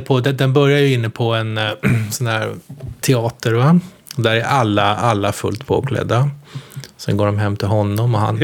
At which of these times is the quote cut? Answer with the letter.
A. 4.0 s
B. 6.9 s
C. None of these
C